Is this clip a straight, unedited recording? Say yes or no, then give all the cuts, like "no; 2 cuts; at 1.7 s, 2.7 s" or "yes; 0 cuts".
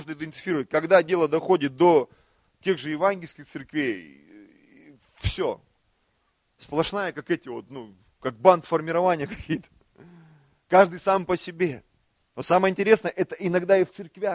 yes; 0 cuts